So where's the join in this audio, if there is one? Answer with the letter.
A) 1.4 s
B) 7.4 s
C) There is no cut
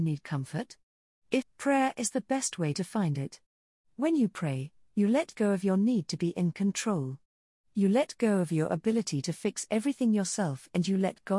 A